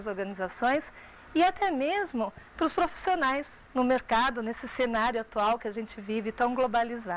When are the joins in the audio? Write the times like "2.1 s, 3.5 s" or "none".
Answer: none